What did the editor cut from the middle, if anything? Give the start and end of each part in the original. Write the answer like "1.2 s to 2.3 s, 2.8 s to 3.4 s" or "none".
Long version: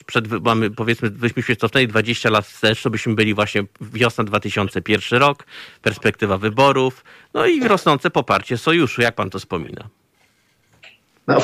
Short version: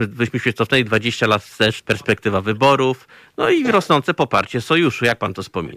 2.8 s to 5.8 s